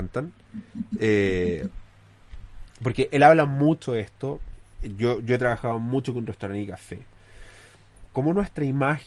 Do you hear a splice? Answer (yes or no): yes